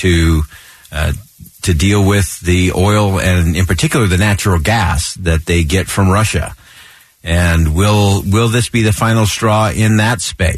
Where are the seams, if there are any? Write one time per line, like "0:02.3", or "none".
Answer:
none

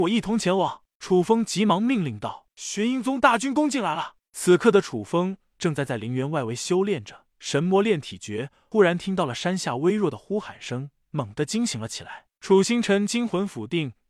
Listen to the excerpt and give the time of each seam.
0:02.5
0:12.3

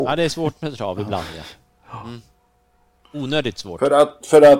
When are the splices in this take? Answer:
none

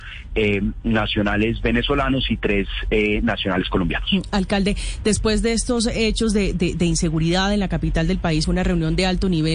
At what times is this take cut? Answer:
0:08.4

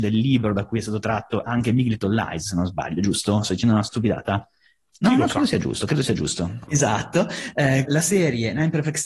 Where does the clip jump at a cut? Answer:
0:06.7
0:07.8

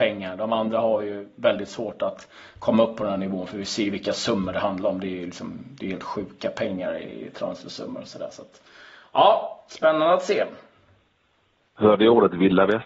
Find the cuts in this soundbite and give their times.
none

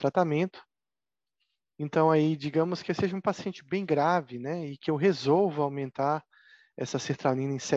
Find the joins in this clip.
none

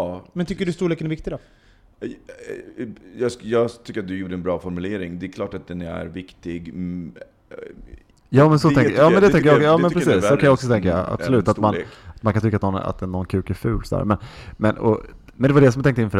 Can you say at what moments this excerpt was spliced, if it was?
0:08.1

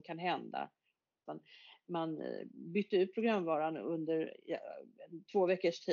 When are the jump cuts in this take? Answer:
0:01.3

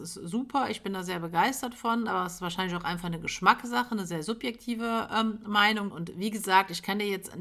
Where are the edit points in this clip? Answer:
0:05.9

